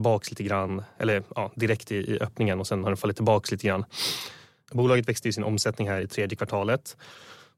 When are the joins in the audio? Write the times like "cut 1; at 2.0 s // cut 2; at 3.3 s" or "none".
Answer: cut 1; at 4.7 s // cut 2; at 6.0 s